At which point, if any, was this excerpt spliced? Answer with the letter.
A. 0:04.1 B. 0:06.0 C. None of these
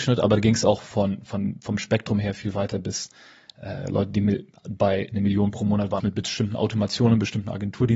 B